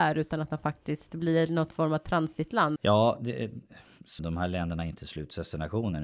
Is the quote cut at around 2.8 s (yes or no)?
yes